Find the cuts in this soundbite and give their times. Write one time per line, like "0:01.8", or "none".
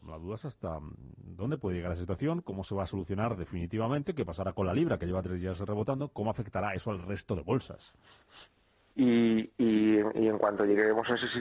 0:08.9